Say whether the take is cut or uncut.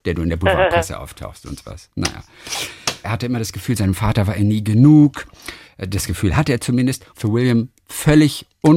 cut